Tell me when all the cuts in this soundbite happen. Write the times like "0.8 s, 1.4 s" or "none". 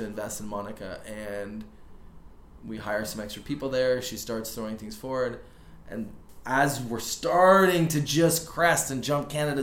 none